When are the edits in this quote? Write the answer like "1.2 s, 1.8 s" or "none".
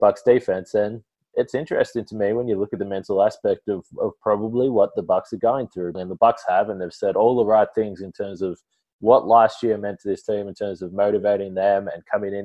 5.9 s